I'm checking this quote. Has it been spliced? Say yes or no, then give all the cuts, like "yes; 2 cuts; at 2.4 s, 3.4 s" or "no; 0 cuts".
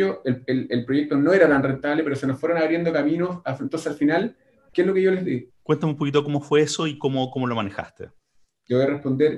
yes; 1 cut; at 5.5 s